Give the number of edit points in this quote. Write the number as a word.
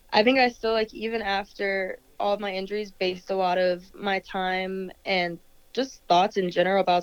zero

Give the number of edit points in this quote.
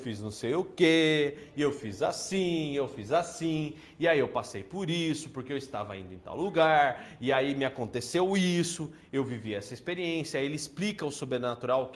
zero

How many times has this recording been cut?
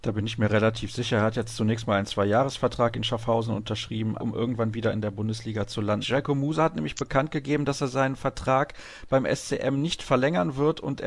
two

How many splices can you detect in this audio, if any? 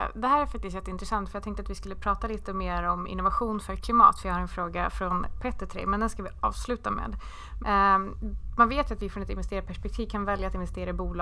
one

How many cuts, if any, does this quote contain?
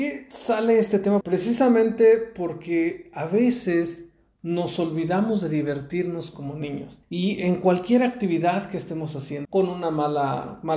three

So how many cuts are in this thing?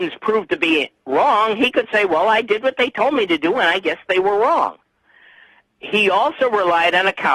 zero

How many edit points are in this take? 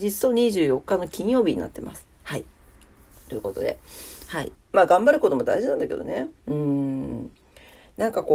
two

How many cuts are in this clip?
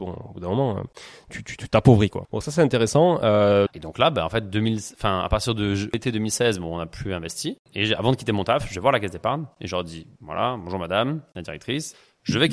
three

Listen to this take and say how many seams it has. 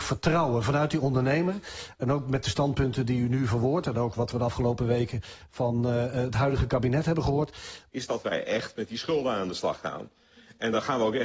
one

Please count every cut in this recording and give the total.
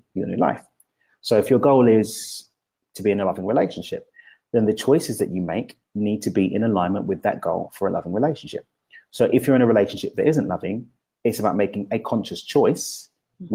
zero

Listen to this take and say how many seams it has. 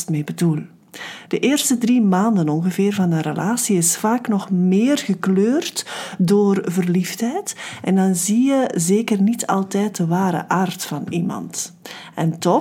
one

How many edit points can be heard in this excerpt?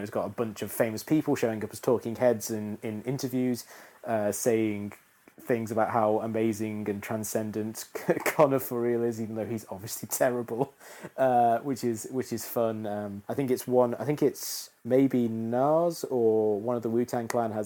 two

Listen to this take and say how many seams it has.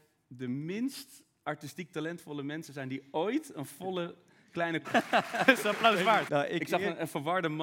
two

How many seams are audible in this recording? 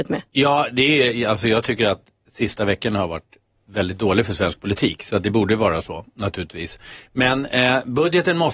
zero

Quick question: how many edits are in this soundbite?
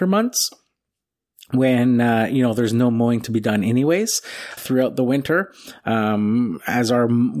one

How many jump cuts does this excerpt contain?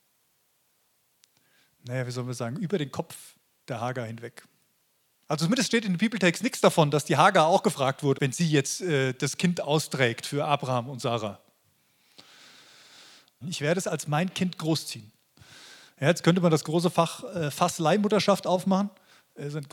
two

